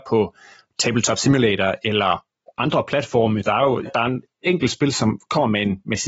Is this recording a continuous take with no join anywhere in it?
no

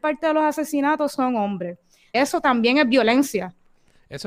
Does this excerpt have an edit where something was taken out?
yes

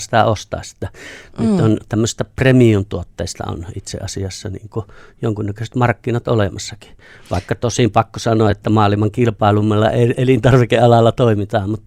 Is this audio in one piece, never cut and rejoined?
yes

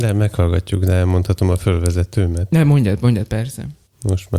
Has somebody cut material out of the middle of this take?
no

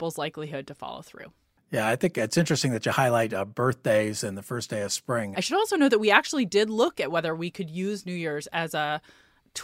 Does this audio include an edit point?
yes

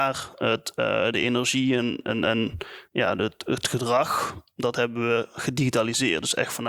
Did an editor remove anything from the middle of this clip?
no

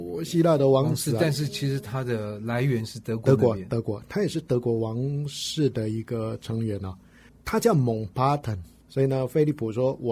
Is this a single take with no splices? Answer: no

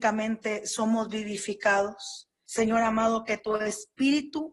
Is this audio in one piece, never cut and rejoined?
no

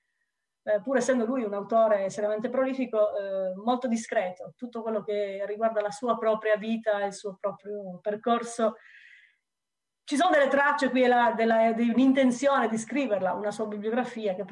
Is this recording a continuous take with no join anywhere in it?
yes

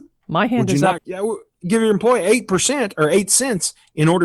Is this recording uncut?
no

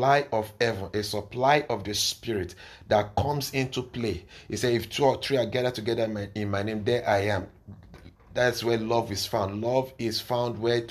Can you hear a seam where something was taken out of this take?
no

